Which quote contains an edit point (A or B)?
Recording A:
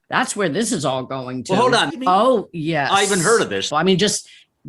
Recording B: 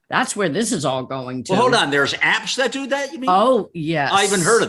A